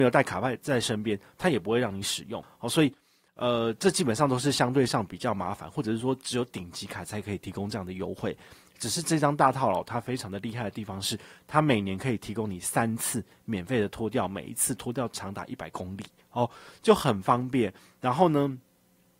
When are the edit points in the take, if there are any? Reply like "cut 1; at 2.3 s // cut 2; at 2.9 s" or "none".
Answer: none